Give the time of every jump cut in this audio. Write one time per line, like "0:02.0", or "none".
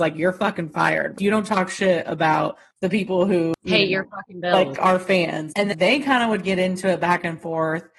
0:05.5